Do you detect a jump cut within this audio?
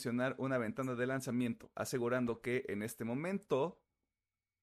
no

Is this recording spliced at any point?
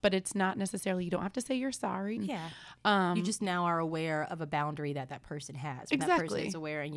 yes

